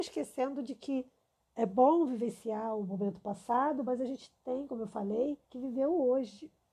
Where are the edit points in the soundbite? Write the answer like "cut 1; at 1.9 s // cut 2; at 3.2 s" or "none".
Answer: cut 1; at 5.4 s